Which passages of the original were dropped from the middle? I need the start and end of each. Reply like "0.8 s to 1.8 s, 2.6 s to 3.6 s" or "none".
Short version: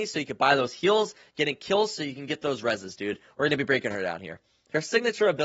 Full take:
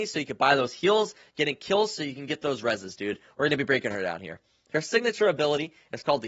none